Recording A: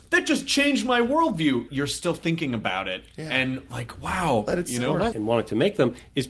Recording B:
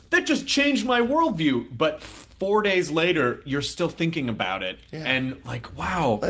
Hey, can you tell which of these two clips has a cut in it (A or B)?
A